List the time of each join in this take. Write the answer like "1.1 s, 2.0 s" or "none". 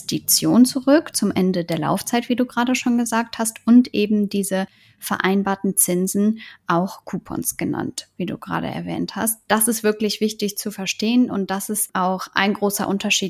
none